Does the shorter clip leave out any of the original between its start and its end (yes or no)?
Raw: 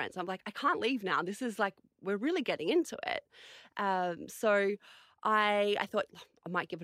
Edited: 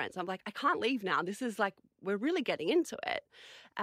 no